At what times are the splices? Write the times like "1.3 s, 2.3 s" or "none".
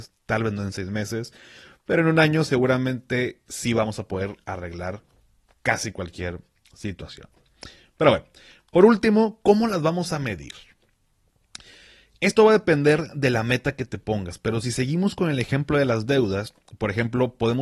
none